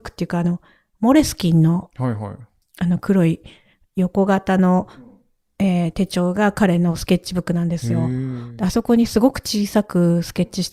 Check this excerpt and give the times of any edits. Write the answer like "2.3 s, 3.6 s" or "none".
none